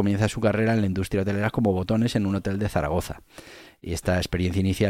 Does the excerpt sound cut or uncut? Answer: uncut